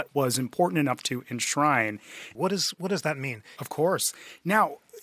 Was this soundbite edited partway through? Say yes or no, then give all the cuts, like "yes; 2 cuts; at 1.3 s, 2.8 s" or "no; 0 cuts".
yes; 2 cuts; at 2.4 s, 3.6 s